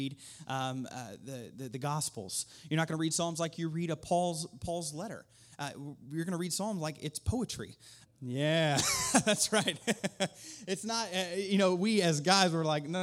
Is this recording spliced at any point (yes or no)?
yes